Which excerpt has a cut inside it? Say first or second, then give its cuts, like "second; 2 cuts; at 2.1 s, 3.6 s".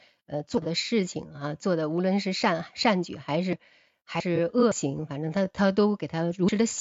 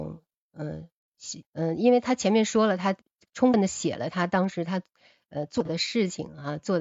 second; 1 cut; at 1.4 s